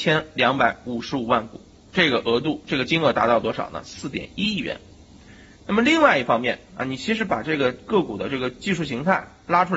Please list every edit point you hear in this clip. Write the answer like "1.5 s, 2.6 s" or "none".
none

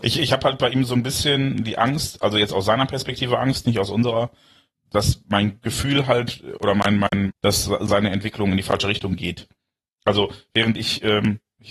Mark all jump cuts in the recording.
4.7 s, 7.3 s

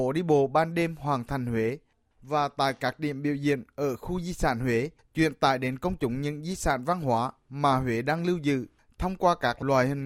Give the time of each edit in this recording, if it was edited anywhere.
5.0 s

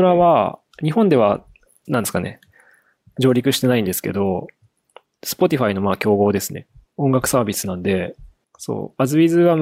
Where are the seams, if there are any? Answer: 1.8 s, 6.9 s, 8.4 s

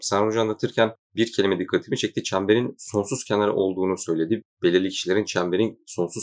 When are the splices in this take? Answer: none

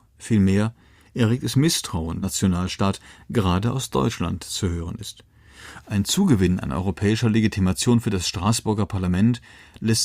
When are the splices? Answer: 2.2 s, 5.8 s

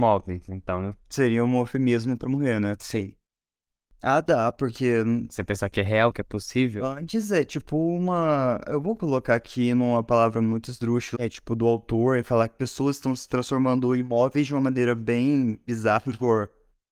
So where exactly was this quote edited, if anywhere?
3.9 s, 11.1 s

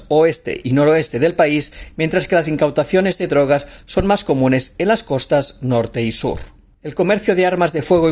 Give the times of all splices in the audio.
6.7 s

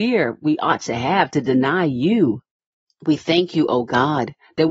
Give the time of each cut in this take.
2.9 s

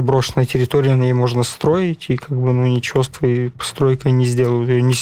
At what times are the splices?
none

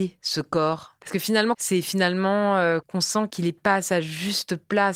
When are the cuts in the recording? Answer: 1.5 s

